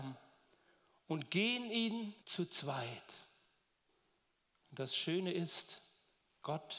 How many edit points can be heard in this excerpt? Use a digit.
1